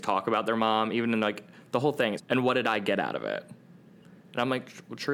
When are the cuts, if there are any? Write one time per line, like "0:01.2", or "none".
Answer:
0:02.2